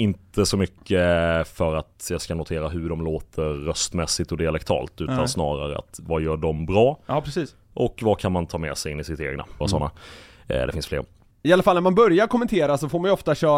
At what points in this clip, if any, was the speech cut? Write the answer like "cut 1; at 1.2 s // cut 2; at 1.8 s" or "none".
cut 1; at 9.6 s

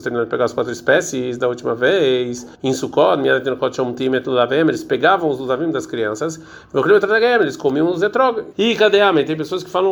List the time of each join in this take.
cut 1; at 2.5 s // cut 2; at 8.5 s

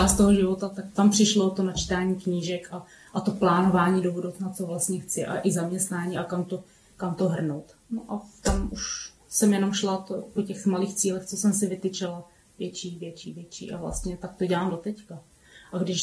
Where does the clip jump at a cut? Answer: none

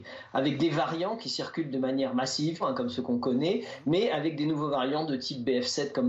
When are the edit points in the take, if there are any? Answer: cut 1; at 2.6 s

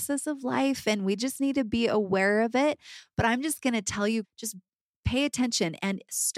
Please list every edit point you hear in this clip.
cut 1; at 4.2 s

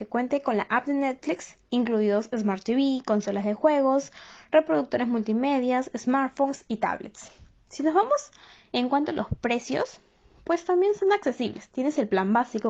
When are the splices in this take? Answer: none

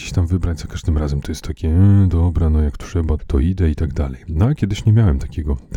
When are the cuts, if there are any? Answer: cut 1; at 3.2 s

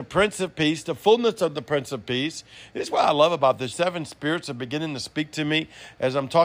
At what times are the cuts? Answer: cut 1; at 2.7 s // cut 2; at 3.7 s

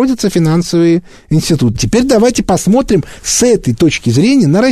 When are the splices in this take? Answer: cut 1; at 1.8 s

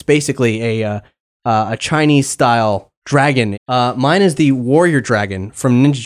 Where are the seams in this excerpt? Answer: cut 1; at 3.5 s

